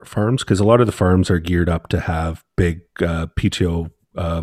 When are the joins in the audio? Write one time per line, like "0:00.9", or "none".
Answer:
none